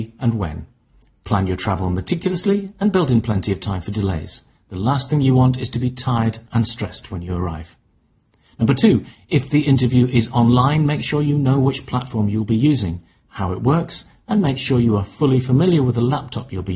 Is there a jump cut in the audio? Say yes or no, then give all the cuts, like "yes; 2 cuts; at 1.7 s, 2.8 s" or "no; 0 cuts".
no; 0 cuts